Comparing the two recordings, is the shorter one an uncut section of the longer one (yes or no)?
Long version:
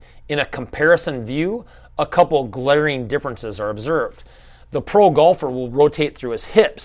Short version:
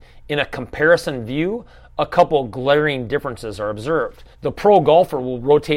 no